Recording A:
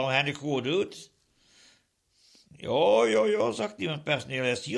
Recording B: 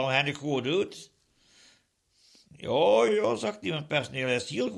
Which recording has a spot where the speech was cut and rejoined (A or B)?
B